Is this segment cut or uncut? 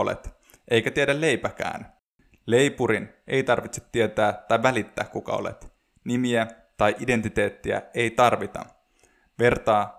uncut